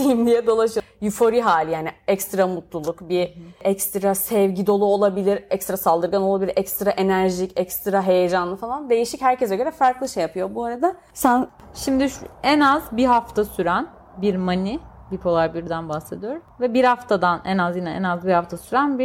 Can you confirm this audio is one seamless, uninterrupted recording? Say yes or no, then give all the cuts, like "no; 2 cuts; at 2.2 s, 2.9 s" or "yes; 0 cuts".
yes; 0 cuts